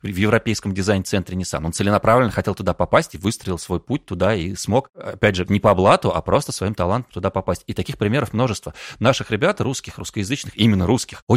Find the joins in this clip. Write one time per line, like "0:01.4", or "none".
0:05.5